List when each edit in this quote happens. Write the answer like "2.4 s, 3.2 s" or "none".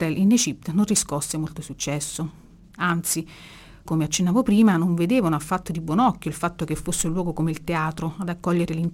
3.9 s